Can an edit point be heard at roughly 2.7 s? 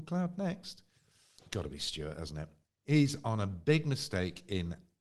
no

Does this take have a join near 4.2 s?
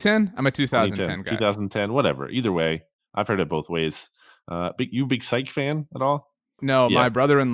no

